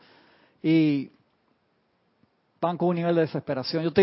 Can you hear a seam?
no; 0 cuts

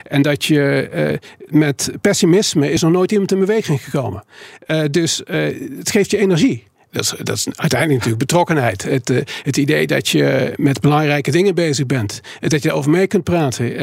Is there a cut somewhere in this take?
yes; 2 cuts; at 1.5 s, 6.9 s

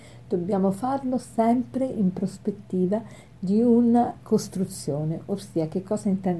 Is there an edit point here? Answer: yes; 1 cut; at 4.2 s

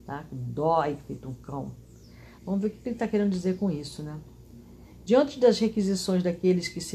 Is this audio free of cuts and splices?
no; 1 cut; at 2.4 s

